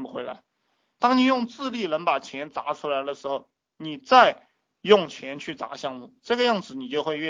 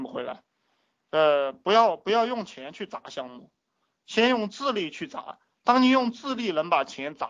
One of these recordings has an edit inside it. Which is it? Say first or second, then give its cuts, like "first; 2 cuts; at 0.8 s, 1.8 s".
first; 1 cut; at 1.0 s